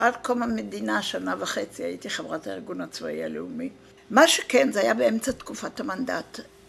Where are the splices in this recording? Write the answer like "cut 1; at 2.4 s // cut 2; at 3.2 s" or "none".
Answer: cut 1; at 4.0 s